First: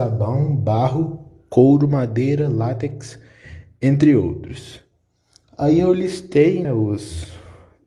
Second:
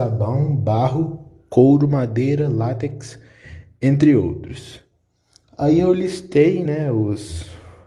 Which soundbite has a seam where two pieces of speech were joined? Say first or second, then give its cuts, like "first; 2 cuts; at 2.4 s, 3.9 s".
first; 1 cut; at 6.6 s